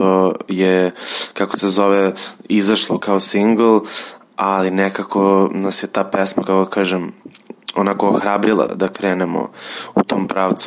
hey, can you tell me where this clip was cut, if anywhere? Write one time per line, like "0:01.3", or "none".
0:03.0
0:08.7